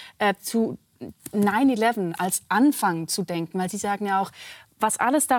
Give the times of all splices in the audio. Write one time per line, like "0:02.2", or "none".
none